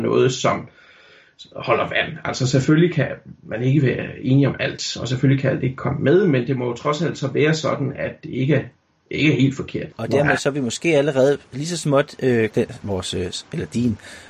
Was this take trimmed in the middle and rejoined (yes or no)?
yes